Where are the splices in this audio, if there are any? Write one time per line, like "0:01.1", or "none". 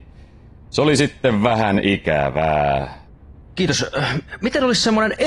0:03.4